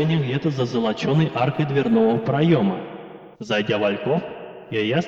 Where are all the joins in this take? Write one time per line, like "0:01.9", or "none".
0:03.3